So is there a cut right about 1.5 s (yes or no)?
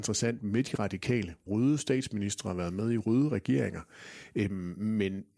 yes